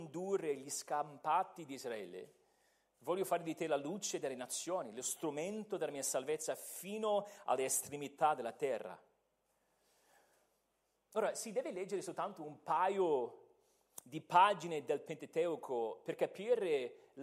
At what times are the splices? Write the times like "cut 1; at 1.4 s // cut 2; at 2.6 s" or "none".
none